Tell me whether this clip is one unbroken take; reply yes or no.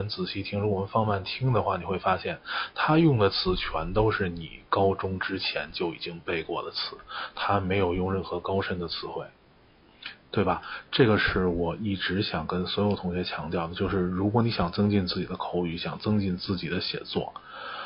yes